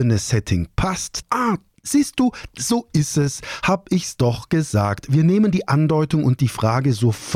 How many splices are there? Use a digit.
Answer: 1